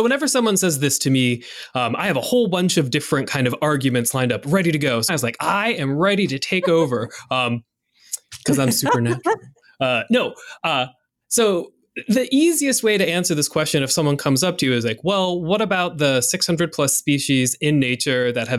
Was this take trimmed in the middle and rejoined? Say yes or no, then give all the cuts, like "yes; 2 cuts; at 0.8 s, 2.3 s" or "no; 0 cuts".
yes; 1 cut; at 5.1 s